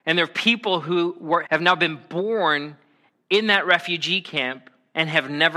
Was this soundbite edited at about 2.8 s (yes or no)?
no